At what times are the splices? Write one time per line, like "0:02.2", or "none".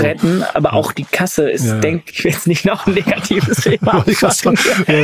0:02.1

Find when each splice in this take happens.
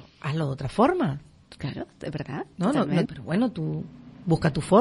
0:03.1

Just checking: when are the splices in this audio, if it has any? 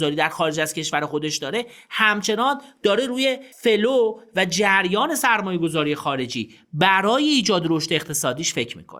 0:03.5

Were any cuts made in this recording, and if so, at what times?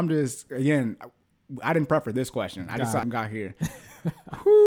0:03.0

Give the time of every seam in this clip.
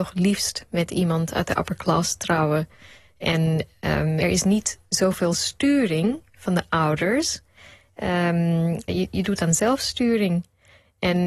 0:04.2
0:08.9

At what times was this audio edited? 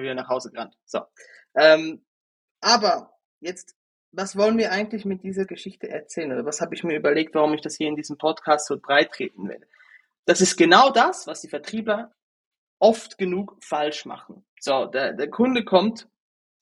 0:14.5

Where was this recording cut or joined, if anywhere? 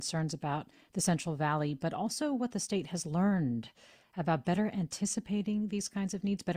none

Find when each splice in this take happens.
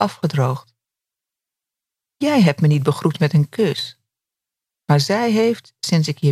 none

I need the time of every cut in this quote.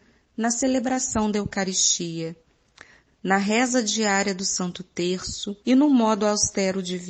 0:03.1
0:05.6

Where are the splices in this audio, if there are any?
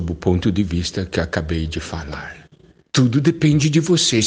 0:02.9

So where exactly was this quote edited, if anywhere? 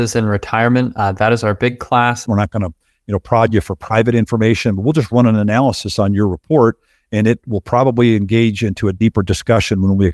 0:02.2

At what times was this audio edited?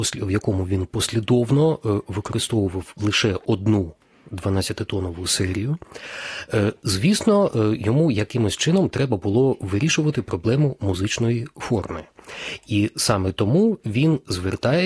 none

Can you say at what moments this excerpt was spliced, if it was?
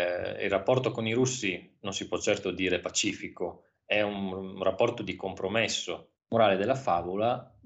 0:06.2

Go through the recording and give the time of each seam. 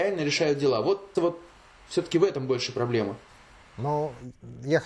0:01.1

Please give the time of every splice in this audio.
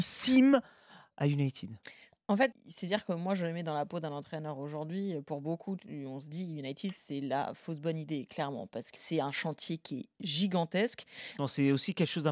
0:02.5
0:09.0
0:11.4

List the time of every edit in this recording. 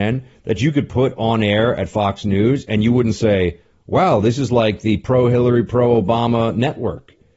none

